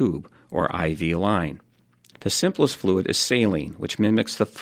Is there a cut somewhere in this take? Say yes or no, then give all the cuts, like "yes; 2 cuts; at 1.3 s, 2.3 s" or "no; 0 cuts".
yes; 1 cut; at 2.1 s